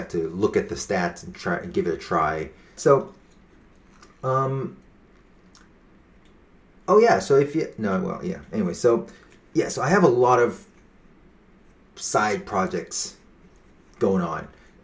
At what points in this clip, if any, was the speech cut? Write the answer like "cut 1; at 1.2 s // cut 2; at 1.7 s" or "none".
cut 1; at 2.8 s

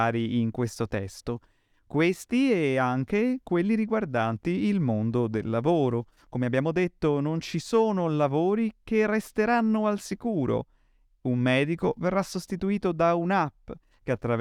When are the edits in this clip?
none

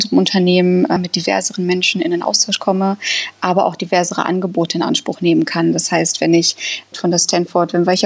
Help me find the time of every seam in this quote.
cut 1; at 1.0 s // cut 2; at 6.9 s

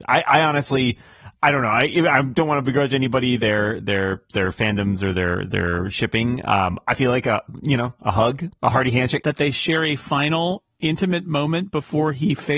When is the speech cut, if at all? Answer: cut 1; at 9.2 s

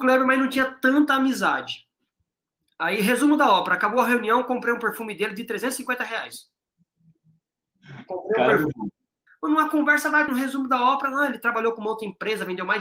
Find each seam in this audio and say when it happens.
cut 1; at 9.3 s // cut 2; at 10.3 s

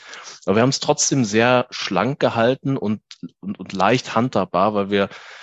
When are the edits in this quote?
none

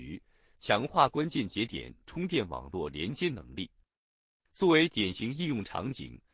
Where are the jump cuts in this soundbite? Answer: none

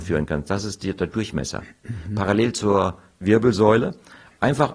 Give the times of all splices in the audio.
none

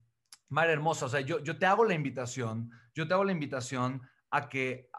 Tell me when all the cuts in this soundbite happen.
none

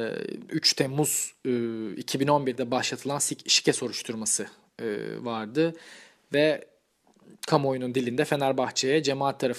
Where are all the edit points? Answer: none

